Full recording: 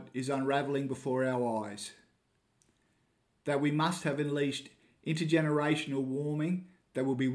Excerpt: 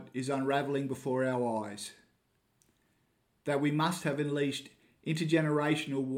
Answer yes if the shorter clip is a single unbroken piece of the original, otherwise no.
yes